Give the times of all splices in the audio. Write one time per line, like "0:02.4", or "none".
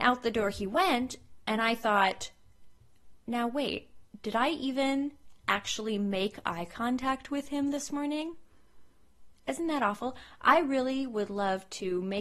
none